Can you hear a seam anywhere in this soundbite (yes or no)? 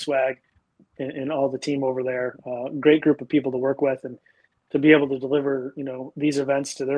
no